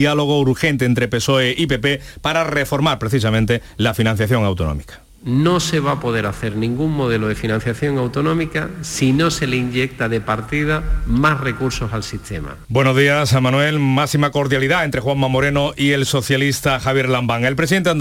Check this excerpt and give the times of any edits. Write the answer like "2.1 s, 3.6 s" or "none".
12.6 s